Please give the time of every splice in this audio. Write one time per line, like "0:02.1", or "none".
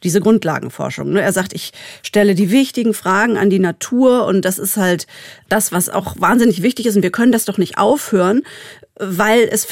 none